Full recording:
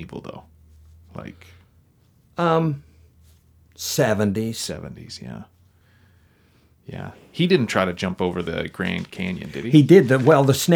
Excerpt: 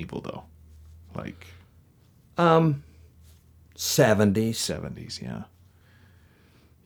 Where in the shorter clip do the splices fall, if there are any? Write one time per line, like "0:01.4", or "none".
none